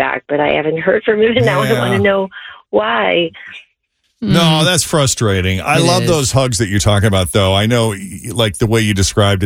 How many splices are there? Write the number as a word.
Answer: zero